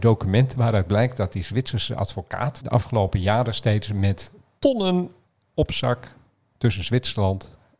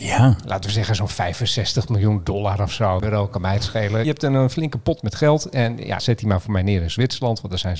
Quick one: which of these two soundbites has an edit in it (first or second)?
second